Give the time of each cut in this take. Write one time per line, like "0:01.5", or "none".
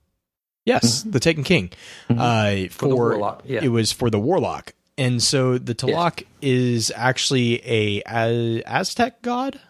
none